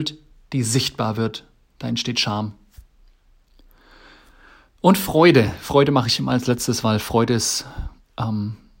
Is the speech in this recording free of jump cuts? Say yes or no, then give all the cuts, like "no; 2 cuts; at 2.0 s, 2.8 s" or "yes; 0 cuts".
yes; 0 cuts